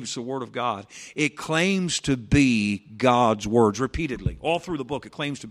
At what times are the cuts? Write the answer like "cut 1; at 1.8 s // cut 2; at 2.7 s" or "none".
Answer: none